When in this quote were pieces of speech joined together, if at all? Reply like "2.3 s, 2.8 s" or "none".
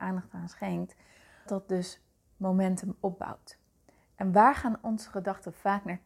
1.5 s